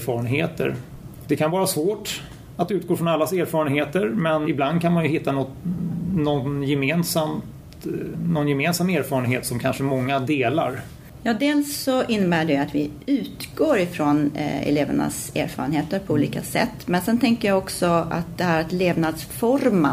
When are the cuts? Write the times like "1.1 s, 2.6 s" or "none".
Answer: 1.2 s, 4.4 s